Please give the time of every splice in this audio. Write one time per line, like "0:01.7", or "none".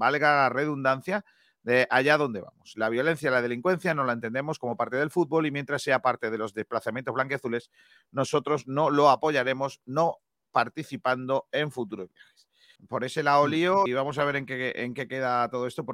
0:12.8
0:13.9

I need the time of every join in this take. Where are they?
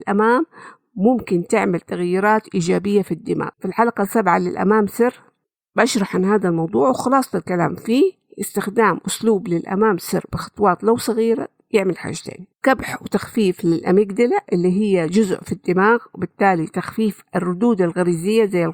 0:03.5
0:12.5

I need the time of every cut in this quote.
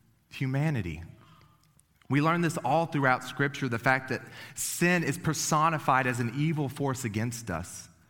none

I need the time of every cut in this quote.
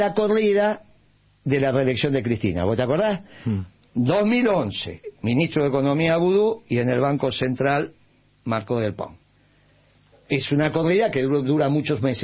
none

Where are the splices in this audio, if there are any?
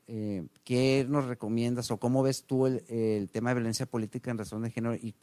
none

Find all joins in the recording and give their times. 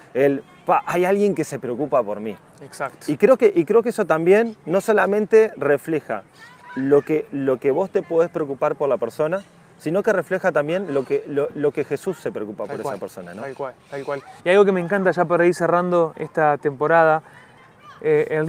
0:14.4
0:16.1

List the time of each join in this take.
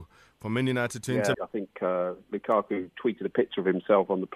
0:01.3

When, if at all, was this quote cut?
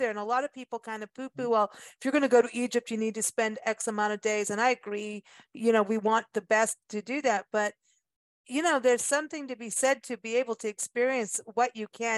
none

